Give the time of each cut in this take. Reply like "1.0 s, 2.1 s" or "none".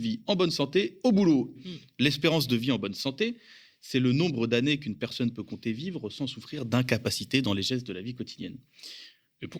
1.6 s